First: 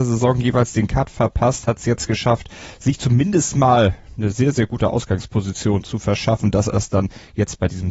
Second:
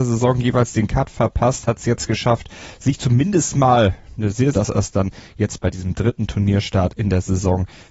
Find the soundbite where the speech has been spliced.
second; 1 cut; at 4.5 s

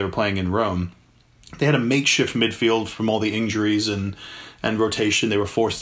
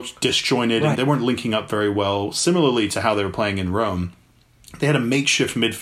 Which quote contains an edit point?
second; 1 cut; at 0.9 s

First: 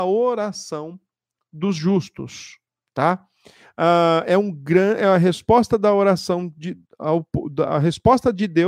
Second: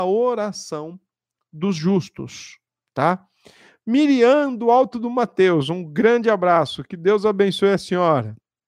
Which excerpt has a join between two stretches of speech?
first; 1 cut; at 3.6 s

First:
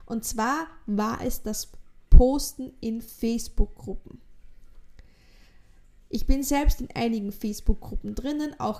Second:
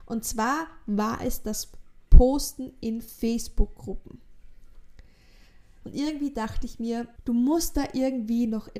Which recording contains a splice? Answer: second; 2 cuts; at 5.8 s, 7.2 s

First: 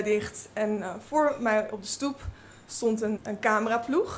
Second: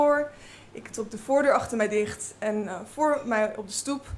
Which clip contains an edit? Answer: first; 1 cut; at 3.2 s

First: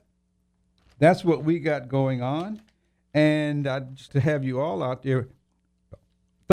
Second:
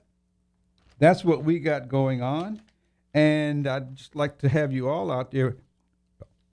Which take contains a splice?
first; 1 cut; at 4.1 s

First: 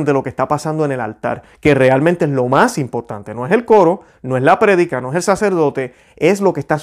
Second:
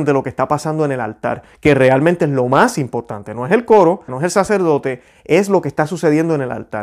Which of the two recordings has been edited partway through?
second; 1 cut; at 4.1 s

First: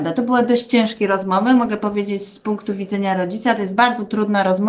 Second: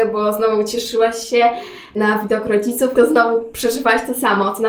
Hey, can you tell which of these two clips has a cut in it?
second; 1 cut; at 2.9 s

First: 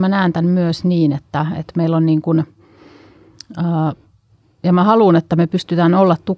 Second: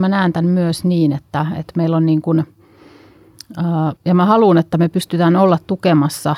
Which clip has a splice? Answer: second; 1 cut; at 4.0 s

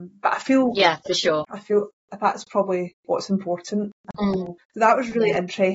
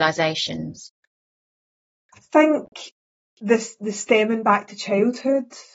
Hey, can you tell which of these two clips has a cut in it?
first; 2 cuts; at 1.5 s, 4.6 s

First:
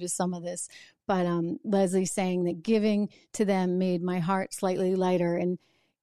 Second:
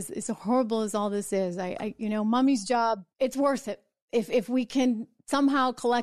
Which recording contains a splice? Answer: second; 1 cut; at 3.1 s

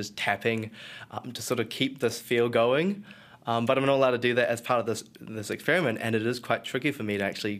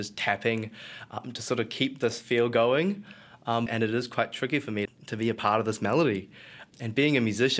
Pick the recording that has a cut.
second; 2 cuts; at 3.7 s, 4.9 s

